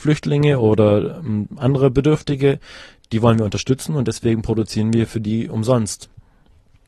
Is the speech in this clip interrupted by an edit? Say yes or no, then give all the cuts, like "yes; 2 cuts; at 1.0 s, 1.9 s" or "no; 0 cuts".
no; 0 cuts